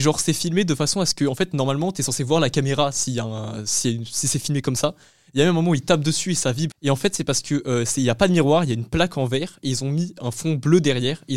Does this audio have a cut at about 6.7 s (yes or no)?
yes